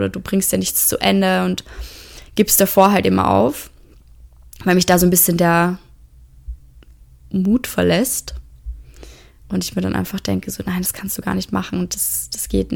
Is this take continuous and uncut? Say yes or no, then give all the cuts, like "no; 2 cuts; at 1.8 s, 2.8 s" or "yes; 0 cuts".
yes; 0 cuts